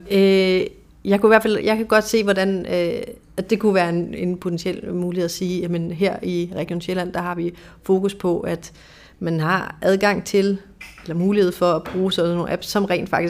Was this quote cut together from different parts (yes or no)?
yes